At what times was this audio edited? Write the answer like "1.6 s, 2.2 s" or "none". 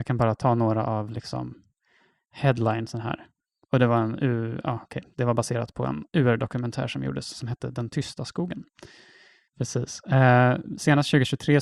6.1 s, 9.5 s